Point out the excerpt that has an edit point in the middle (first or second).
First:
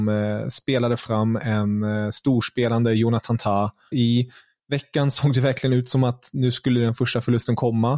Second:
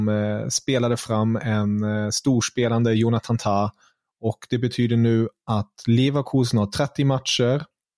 first